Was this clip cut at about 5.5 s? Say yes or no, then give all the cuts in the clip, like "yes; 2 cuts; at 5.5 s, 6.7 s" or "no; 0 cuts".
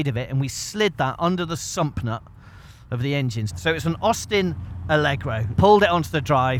yes; 2 cuts; at 3.5 s, 5.5 s